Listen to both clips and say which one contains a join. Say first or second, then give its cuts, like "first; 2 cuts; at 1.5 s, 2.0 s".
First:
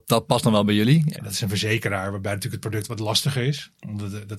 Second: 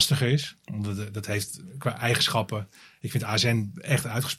first; 1 cut; at 1.1 s